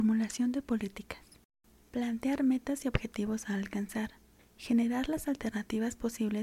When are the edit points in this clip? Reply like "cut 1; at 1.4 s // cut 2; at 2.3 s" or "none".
cut 1; at 1.8 s // cut 2; at 4.4 s